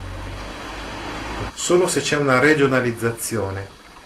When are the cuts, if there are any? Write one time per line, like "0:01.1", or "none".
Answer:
0:01.5

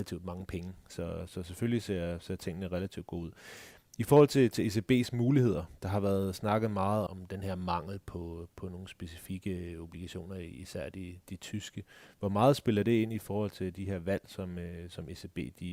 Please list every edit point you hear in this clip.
0:07.1

